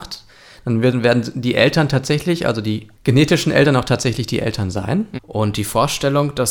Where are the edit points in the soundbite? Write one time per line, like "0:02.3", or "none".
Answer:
0:05.1